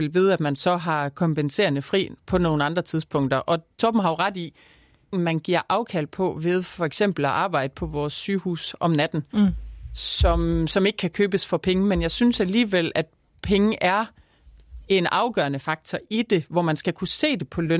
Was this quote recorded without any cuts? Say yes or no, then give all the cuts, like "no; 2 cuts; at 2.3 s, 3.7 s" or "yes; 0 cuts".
no; 1 cut; at 5.1 s